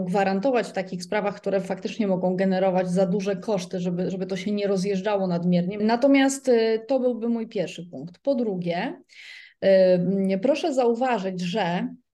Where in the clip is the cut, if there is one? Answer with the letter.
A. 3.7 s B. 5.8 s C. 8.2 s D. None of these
B